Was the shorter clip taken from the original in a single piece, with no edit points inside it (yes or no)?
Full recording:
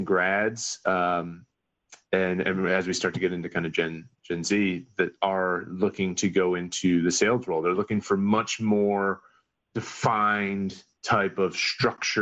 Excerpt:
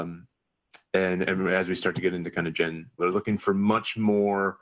no